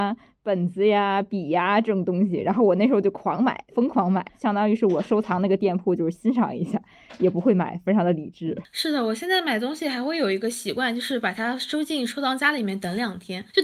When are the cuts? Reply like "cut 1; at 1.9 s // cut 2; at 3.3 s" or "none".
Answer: cut 1; at 4.3 s